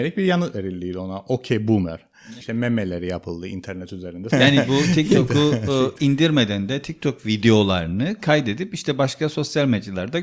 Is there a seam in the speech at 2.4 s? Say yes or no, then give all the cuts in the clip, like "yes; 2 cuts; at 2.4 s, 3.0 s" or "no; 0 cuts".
yes; 2 cuts; at 2.4 s, 4.3 s